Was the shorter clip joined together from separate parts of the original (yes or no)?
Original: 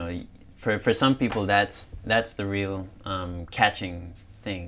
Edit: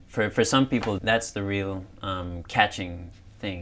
yes